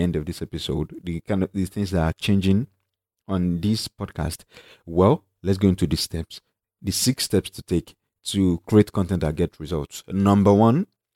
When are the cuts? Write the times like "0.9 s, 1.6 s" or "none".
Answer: none